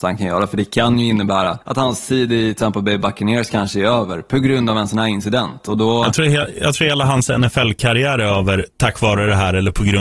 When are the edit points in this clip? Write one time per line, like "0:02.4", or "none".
0:01.6